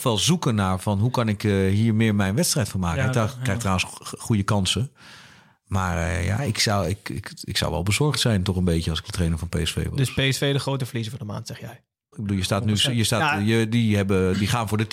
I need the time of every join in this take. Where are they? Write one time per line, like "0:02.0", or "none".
0:12.1